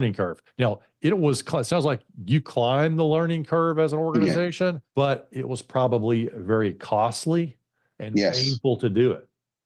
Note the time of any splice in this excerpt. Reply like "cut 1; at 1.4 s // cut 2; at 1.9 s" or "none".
cut 1; at 4.9 s